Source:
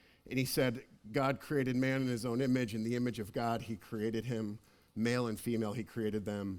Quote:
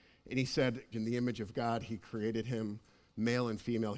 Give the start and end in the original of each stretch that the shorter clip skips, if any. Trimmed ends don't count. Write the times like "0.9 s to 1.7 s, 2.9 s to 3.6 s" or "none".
0.9 s to 2.7 s